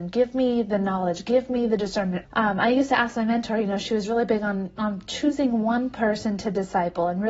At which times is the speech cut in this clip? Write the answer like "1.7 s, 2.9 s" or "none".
2.2 s